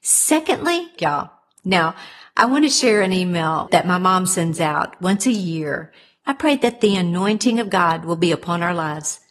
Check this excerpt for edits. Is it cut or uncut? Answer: cut